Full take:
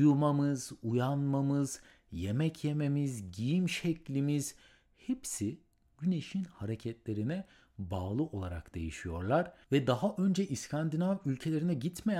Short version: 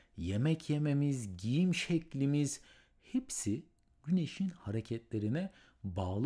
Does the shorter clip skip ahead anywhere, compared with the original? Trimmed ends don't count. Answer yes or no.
no